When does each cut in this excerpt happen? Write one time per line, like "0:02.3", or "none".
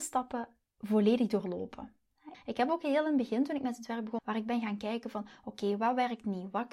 0:02.3
0:04.2